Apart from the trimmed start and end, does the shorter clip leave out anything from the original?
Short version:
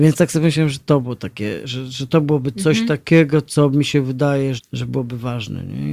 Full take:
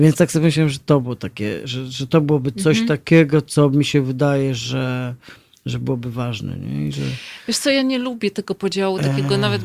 yes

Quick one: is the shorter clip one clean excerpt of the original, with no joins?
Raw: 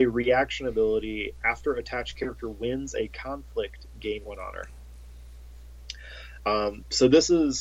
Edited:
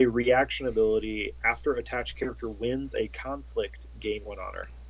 yes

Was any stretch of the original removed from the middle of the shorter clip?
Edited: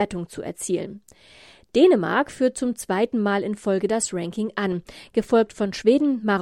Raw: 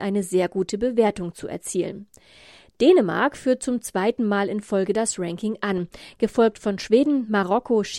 no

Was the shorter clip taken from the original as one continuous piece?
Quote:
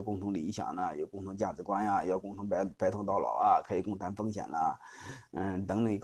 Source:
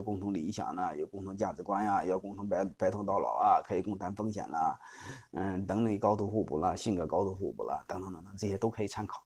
yes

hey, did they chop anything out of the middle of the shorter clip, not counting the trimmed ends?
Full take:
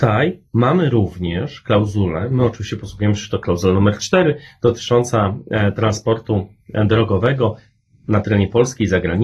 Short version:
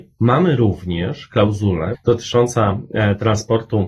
yes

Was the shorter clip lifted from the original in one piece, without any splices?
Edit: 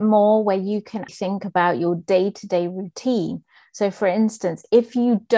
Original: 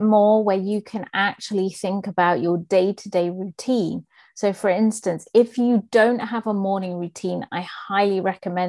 no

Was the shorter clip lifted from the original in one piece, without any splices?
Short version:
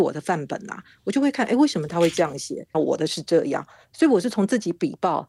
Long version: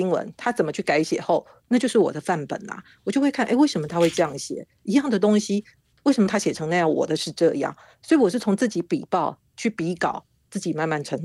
no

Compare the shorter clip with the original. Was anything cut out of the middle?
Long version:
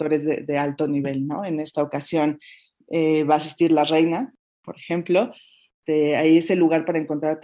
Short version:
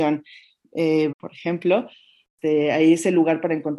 yes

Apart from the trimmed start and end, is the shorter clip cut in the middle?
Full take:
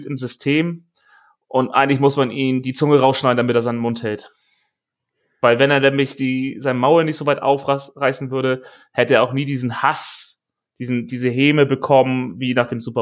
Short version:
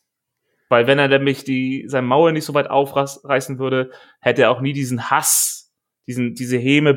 no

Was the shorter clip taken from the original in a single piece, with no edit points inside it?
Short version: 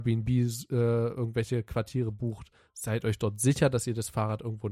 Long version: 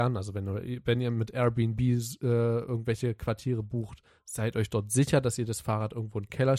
yes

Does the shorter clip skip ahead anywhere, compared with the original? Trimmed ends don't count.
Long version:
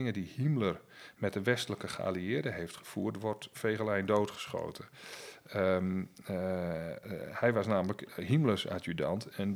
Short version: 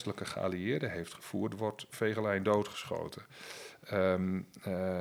no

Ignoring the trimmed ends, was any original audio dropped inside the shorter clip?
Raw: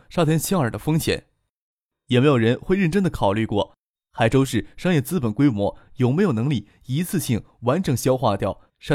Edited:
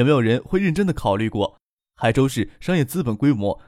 no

